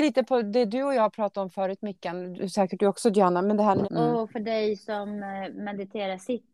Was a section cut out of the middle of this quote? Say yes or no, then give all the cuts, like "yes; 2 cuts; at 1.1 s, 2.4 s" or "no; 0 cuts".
yes; 2 cuts; at 2.3 s, 3.8 s